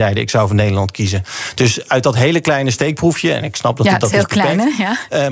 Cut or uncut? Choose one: uncut